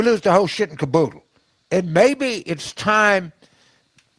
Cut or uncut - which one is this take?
uncut